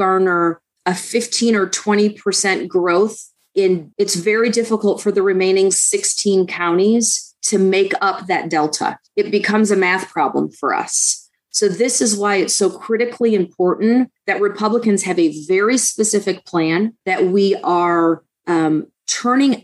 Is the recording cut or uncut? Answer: cut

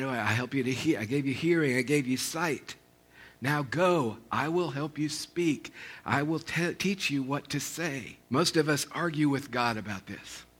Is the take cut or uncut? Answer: cut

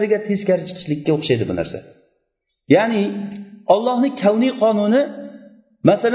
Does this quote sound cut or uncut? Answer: uncut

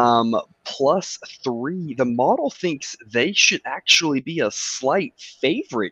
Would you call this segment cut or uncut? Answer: uncut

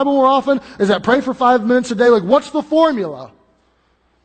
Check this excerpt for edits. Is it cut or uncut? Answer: uncut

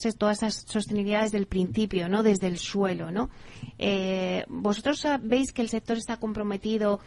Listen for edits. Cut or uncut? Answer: uncut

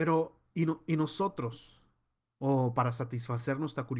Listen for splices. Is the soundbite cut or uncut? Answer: cut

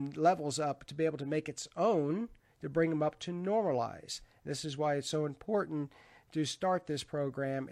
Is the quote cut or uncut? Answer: uncut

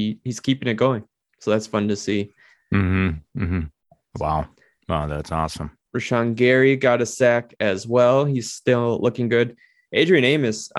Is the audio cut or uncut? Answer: cut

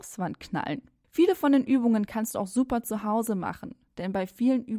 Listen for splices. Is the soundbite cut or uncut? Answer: cut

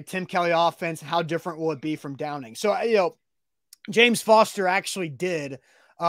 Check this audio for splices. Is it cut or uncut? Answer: uncut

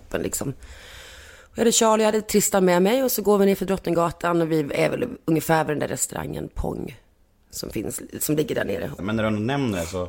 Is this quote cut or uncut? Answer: cut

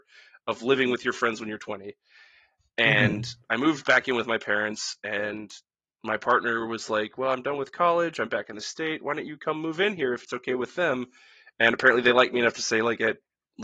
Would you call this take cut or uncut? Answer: uncut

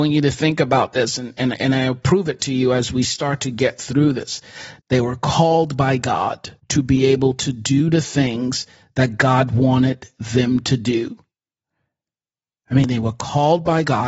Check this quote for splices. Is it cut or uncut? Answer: cut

